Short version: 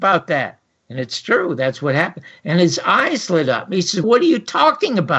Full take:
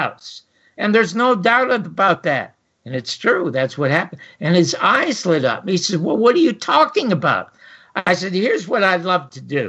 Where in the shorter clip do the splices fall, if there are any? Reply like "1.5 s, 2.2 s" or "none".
4.0 s